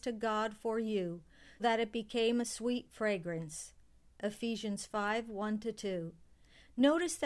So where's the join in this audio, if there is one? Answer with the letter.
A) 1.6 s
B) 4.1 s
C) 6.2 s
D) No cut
A